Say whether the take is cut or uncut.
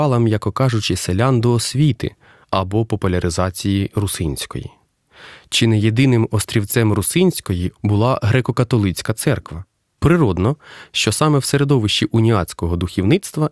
cut